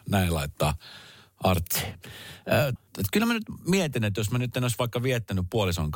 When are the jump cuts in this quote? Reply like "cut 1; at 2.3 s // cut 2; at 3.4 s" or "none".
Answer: cut 1; at 2.8 s